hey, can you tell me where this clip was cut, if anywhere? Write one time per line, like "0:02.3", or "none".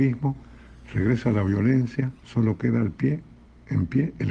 0:02.2